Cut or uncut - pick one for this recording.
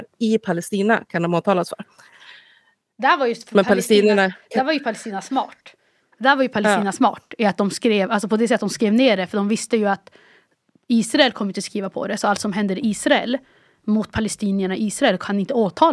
uncut